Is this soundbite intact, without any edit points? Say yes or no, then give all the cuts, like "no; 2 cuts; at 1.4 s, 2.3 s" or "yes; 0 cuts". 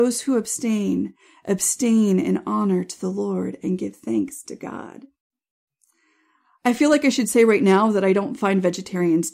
yes; 0 cuts